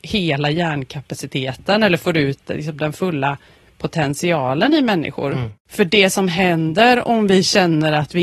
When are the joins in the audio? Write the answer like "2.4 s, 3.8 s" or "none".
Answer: none